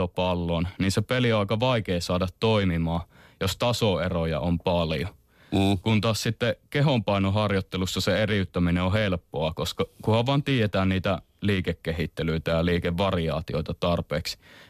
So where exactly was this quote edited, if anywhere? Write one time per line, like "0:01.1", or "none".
none